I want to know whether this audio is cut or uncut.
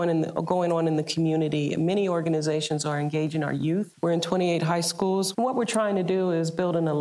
cut